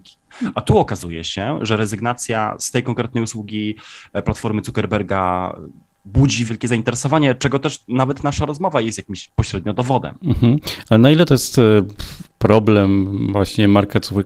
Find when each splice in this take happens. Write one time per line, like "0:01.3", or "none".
0:06.5